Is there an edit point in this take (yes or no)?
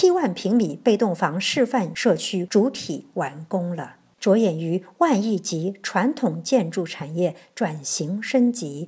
yes